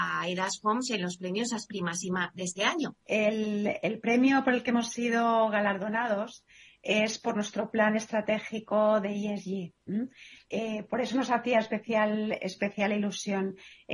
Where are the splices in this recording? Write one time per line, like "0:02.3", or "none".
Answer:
0:03.0